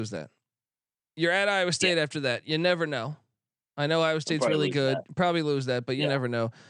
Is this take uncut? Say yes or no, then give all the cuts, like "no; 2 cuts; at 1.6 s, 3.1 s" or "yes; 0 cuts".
yes; 0 cuts